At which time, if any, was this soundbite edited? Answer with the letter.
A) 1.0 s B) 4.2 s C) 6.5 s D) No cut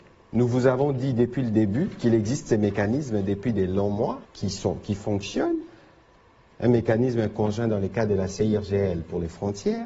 B